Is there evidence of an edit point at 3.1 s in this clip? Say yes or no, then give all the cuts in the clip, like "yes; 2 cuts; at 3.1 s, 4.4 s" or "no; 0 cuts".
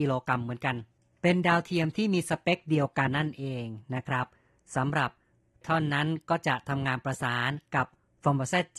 yes; 2 cuts; at 3.1 s, 5.6 s